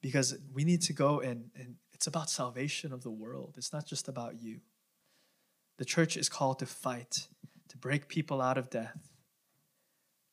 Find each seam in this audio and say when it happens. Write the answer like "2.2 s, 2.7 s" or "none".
none